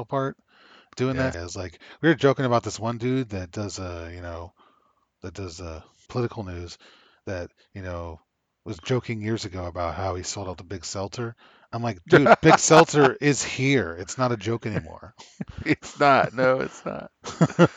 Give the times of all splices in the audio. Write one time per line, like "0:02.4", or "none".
0:01.3
0:06.1